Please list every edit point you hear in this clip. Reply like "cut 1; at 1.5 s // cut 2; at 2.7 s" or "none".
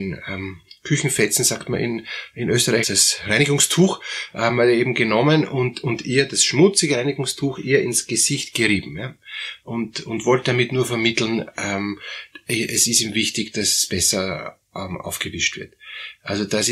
cut 1; at 2.8 s

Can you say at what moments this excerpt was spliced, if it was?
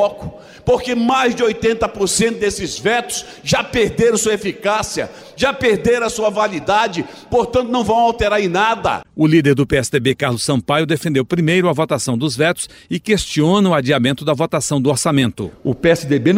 none

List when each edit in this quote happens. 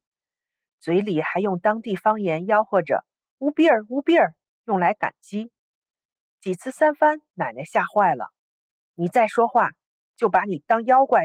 none

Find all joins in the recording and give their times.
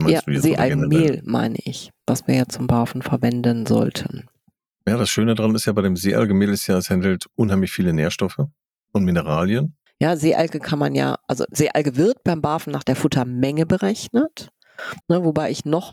cut 1; at 9.9 s // cut 2; at 15.0 s

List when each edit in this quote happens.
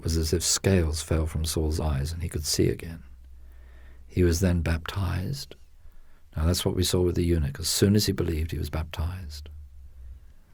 none

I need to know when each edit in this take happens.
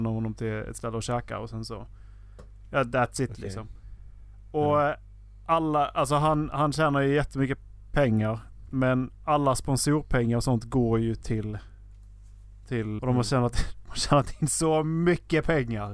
cut 1; at 13.0 s

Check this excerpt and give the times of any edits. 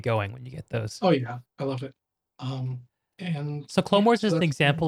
cut 1; at 1.5 s

